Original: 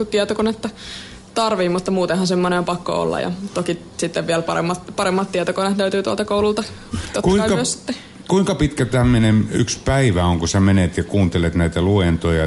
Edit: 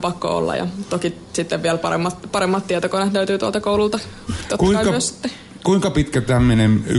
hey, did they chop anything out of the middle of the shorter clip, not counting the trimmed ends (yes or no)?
no